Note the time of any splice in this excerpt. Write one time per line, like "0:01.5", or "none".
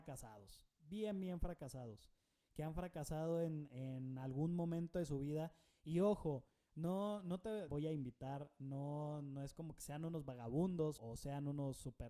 0:07.7
0:11.0